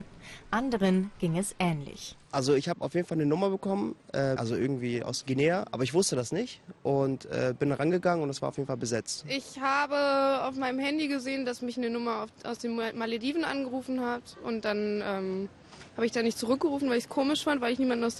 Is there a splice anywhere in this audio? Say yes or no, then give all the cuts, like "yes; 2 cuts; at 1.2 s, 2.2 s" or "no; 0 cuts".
yes; 1 cut; at 4.4 s